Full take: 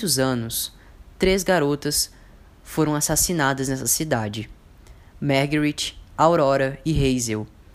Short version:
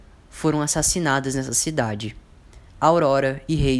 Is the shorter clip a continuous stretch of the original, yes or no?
no